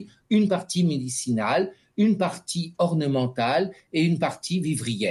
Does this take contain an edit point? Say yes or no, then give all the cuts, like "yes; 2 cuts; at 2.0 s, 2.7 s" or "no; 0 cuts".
no; 0 cuts